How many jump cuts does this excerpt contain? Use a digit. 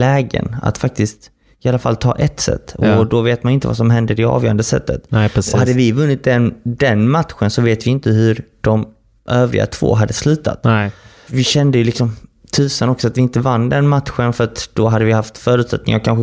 0